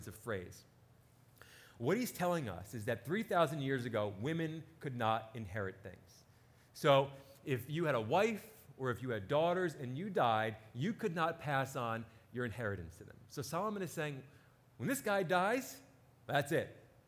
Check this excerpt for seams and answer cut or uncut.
uncut